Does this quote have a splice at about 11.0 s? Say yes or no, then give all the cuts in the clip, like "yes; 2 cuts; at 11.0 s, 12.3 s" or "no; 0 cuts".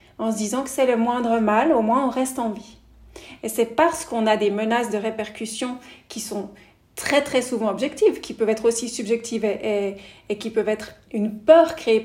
yes; 2 cuts; at 3.4 s, 11.0 s